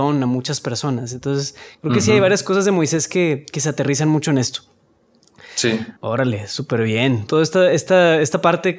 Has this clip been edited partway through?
yes; 2 cuts; at 6.0 s, 7.3 s

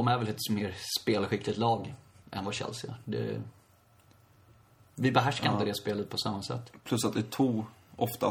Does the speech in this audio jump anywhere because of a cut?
no; 0 cuts

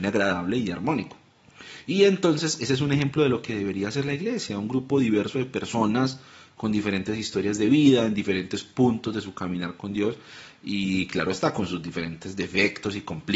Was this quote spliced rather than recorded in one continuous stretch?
no; 0 cuts

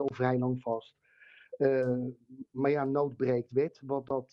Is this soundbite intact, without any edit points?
yes; 0 cuts

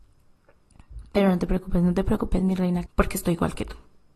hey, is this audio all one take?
no; 1 cut; at 2.9 s

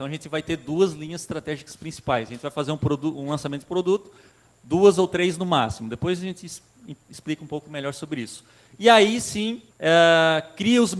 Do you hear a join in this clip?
yes; 1 cut; at 9.7 s

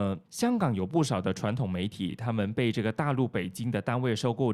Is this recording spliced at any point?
no; 0 cuts

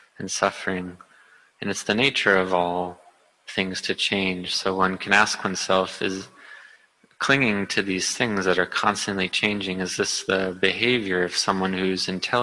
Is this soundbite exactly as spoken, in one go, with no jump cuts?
yes; 0 cuts

